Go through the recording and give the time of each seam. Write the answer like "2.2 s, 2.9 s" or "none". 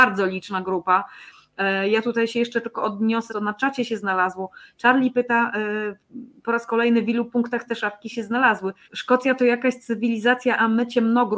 3.3 s, 8.8 s

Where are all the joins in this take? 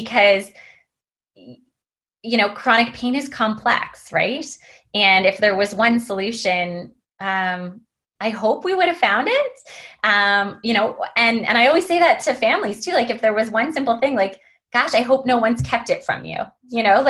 none

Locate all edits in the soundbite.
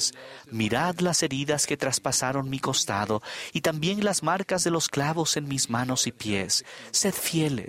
none

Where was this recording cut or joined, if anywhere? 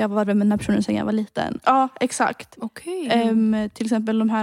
1.6 s

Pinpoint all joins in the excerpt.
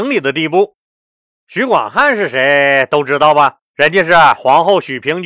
1.4 s, 3.7 s

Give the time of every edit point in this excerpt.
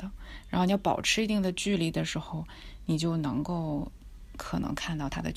none

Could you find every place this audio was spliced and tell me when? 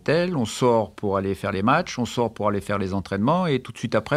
none

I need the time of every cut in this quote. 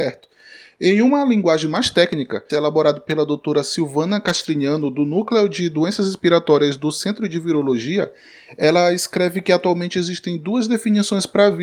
2.5 s

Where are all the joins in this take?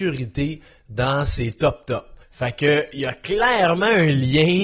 2.2 s

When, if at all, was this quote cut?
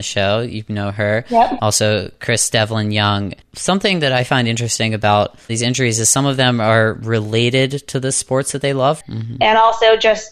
3.4 s, 9.0 s

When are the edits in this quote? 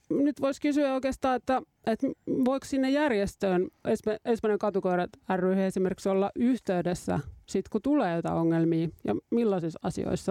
none

